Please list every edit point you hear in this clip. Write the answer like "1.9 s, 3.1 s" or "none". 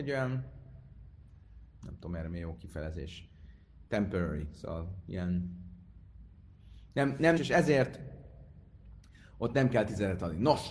7.4 s